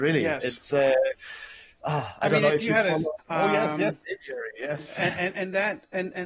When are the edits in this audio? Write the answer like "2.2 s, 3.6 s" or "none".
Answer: 3.2 s